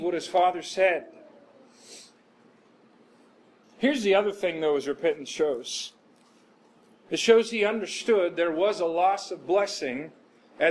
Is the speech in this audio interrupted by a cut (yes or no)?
yes